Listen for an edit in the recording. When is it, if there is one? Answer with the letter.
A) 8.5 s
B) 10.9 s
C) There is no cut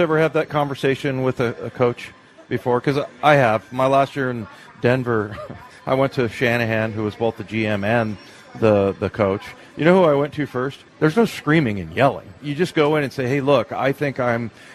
B